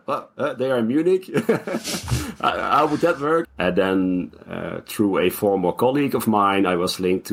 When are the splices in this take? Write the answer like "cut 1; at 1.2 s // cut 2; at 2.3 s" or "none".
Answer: cut 1; at 3.4 s